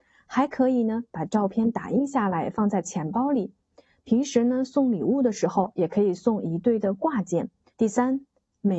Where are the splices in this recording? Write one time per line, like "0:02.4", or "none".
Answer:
0:07.7